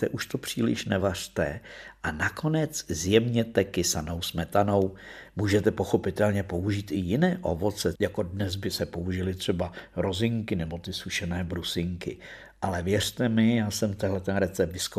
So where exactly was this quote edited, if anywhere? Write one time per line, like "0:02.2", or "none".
0:07.9